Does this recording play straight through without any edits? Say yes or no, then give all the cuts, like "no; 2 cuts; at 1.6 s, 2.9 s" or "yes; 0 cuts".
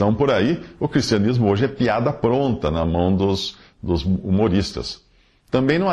yes; 0 cuts